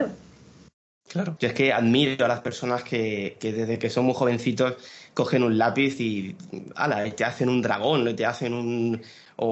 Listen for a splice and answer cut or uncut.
cut